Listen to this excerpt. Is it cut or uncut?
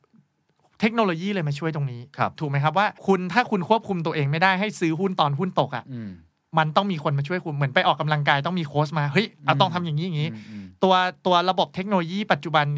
cut